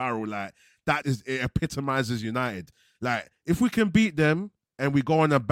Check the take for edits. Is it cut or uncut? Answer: cut